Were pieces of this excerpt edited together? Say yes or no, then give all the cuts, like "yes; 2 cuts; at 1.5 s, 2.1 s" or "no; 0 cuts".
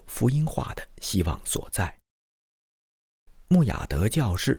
no; 0 cuts